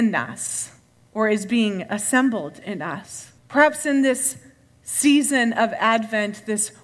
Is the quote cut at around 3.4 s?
yes; 1 cut; at 3.4 s

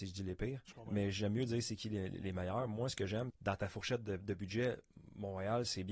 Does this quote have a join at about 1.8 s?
no; 1 cut; at 3.3 s

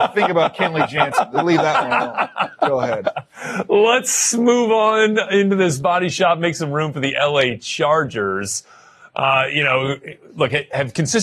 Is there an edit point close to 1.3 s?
no; 0 cuts

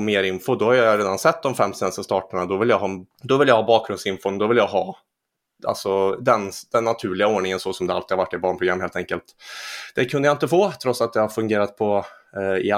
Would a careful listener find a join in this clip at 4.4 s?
no; 1 cut; at 3.1 s

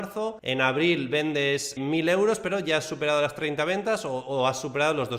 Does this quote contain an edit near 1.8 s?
yes; 1 cut; at 1.8 s

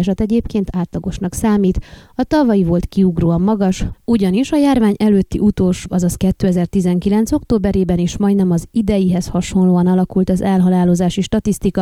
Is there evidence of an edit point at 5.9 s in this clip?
yes; 1 cut; at 5.9 s

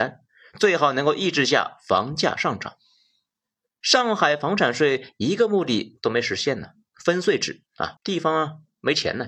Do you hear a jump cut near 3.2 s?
no; 2 cuts; at 6.9 s, 8.0 s

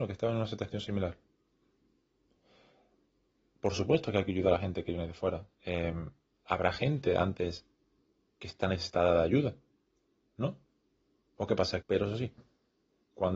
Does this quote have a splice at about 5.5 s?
yes; 2 cuts; at 5.5 s, 11.8 s

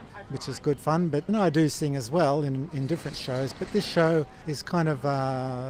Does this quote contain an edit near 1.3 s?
yes; 1 cut; at 1.3 s

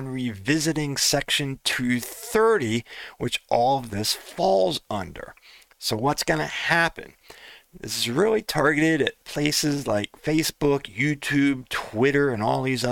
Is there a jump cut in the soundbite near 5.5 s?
no; 0 cuts

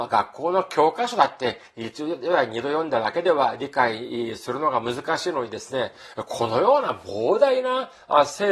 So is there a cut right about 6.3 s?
no; 0 cuts

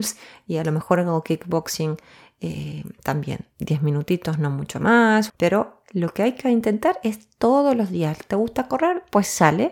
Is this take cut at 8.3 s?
no; 1 cut; at 5.3 s

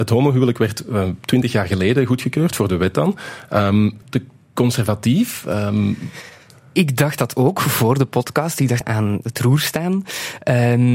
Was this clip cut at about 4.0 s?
yes; 2 cuts; at 4.0 s, 8.8 s

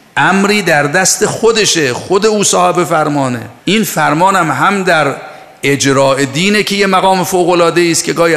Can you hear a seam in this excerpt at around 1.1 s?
no; 1 cut; at 3.6 s

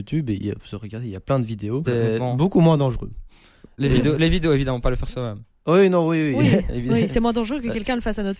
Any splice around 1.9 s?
yes; 1 cut; at 1.9 s

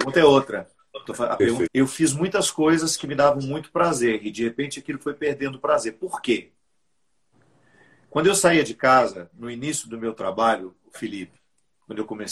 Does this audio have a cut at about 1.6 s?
yes; 1 cut; at 1.6 s

